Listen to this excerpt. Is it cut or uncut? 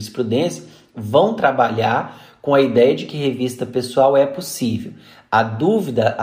uncut